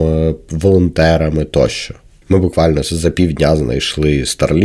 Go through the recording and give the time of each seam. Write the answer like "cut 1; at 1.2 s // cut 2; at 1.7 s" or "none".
cut 1; at 2.2 s